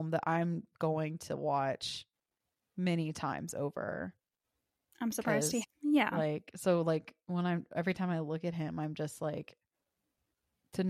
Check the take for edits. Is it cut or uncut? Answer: cut